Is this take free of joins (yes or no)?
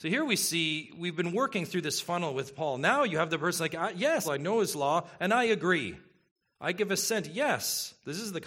no